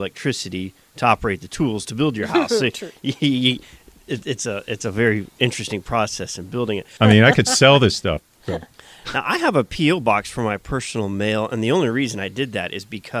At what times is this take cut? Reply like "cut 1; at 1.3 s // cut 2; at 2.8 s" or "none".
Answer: cut 1; at 7.0 s